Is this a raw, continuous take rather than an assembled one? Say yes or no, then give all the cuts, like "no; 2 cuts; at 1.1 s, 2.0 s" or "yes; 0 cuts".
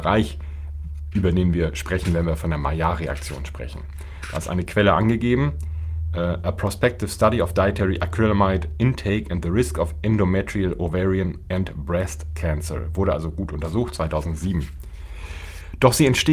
no; 1 cut; at 1.1 s